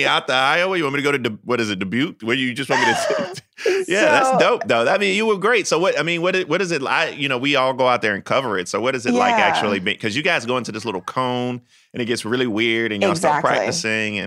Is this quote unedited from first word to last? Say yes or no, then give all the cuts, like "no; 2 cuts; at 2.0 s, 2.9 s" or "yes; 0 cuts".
yes; 0 cuts